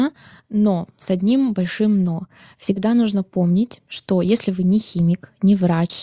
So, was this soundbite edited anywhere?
no; 0 cuts

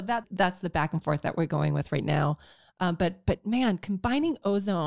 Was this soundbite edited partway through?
no; 0 cuts

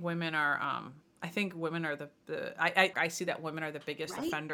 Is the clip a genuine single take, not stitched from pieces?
no; 1 cut; at 2.9 s

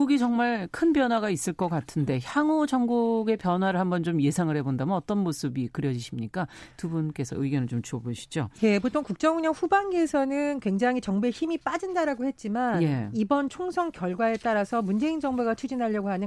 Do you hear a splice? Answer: no; 0 cuts

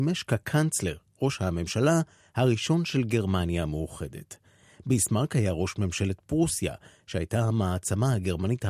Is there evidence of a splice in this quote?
no; 0 cuts

